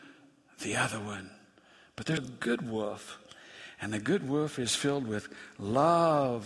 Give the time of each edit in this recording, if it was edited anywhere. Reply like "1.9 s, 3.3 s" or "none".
2.2 s

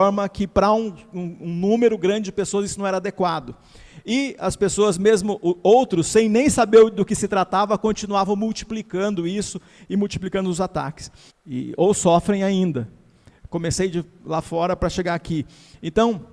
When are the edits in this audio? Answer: 11.3 s, 13.5 s

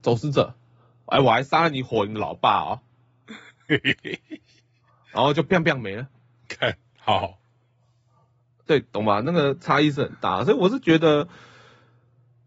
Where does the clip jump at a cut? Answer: 5.6 s

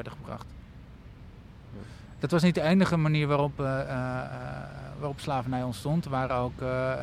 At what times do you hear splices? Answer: none

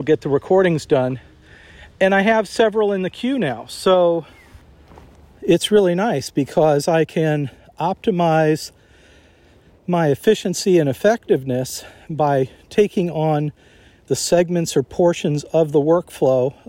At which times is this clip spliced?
none

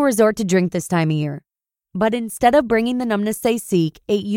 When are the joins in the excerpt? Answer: none

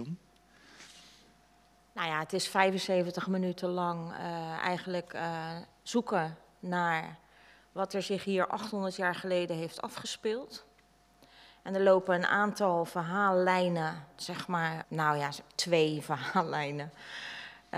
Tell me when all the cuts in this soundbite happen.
14.8 s

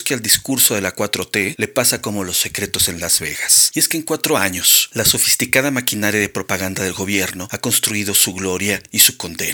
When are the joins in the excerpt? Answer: 3.7 s

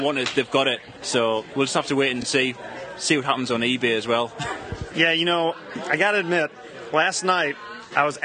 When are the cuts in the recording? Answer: none

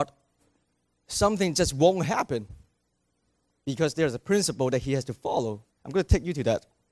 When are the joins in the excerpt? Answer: 5.7 s

